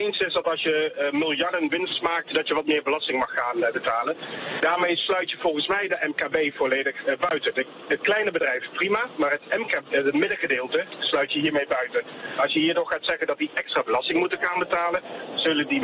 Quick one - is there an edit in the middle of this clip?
yes; 1 cut; at 4.6 s

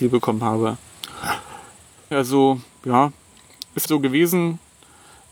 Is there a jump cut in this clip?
yes; 2 cuts; at 2.1 s, 3.9 s

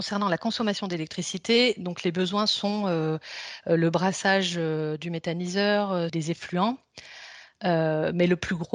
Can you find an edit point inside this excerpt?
yes; 1 cut; at 6.1 s

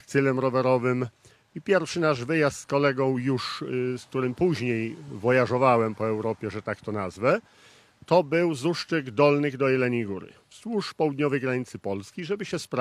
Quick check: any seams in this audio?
no; 0 cuts

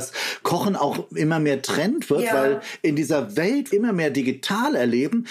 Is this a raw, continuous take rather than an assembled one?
no; 1 cut; at 3.7 s

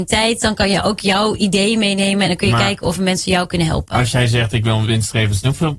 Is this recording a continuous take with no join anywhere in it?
yes; 0 cuts

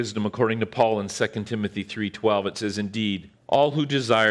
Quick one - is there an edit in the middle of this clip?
yes; 1 cut; at 3.4 s

